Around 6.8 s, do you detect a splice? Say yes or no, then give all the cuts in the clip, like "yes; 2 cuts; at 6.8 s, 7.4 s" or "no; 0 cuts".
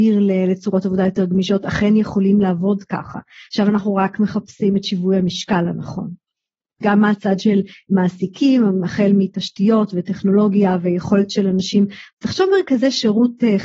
yes; 1 cut; at 6.8 s